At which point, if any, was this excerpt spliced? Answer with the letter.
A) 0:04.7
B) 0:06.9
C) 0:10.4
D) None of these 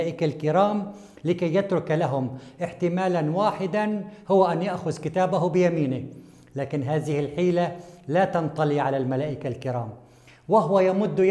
D